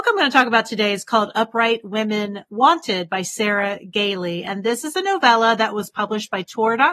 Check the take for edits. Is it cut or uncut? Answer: uncut